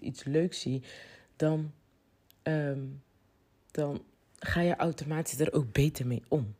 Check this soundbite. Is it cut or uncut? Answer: uncut